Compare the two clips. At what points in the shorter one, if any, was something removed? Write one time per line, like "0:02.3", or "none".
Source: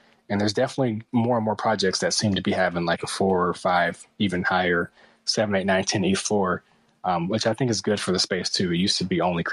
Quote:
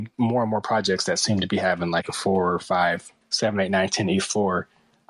0:03.2

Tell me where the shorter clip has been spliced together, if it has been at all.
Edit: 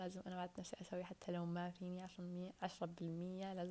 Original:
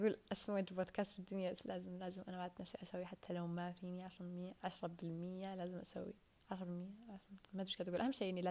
none

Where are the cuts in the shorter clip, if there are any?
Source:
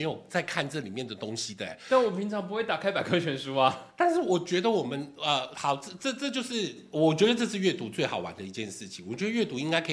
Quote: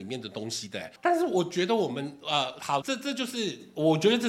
0:01.0
0:02.8

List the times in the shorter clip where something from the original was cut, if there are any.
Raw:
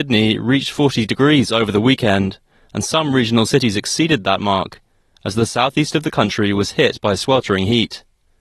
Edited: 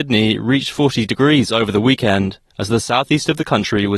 0:02.5

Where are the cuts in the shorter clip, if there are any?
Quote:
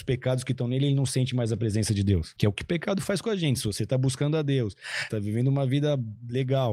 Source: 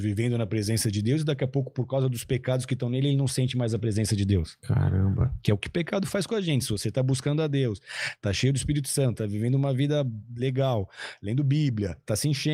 0:02.4
0:05.1

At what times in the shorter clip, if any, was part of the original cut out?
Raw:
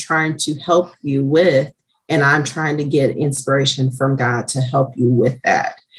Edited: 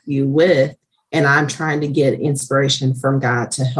none

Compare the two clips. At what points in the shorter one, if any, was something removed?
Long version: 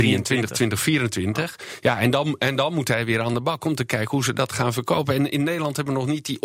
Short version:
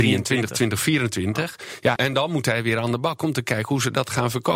0:02.0

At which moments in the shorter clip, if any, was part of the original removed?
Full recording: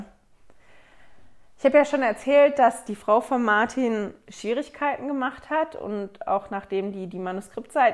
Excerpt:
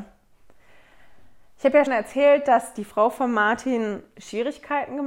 0:01.9

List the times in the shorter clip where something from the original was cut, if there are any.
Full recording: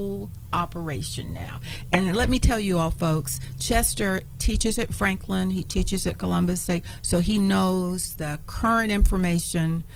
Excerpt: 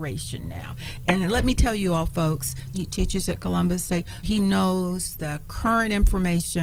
0:02.7
0:04.2

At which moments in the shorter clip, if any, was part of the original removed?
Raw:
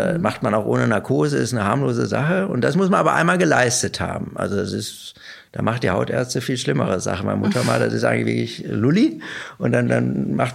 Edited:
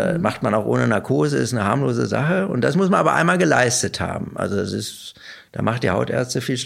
none

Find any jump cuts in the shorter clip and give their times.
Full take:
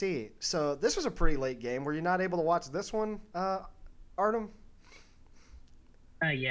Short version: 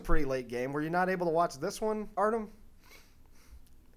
0:02.2

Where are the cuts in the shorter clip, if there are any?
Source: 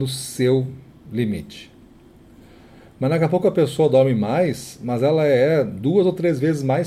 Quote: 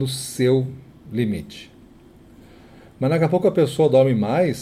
none

